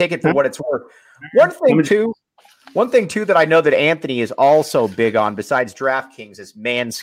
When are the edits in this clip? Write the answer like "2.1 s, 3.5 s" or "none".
none